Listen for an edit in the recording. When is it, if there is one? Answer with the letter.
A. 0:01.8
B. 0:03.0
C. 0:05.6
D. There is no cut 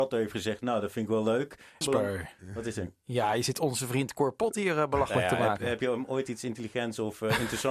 A